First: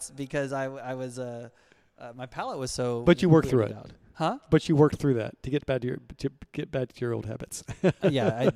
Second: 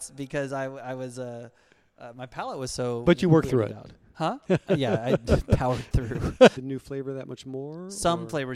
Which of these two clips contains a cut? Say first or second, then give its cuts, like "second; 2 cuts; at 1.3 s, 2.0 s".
second; 2 cuts; at 4.4 s, 6.5 s